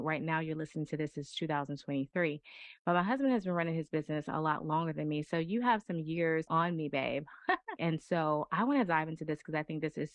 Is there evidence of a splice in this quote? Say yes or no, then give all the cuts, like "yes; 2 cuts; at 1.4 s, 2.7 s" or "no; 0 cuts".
yes; 2 cuts; at 6.5 s, 7.8 s